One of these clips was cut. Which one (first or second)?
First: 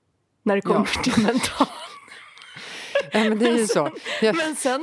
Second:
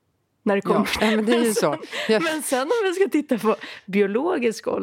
second